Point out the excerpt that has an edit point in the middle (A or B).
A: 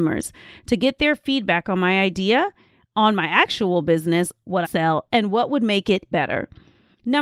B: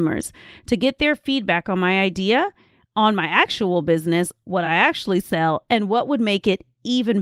A